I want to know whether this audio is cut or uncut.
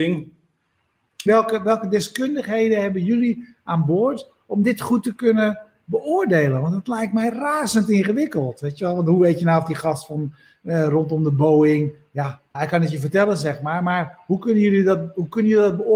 cut